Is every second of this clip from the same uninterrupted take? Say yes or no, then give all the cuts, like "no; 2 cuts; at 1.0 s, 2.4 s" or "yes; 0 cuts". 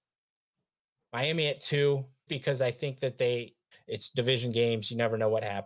no; 2 cuts; at 2.3 s, 3.7 s